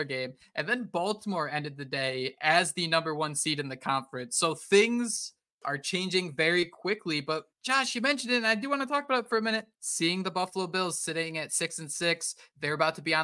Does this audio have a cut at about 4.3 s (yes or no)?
no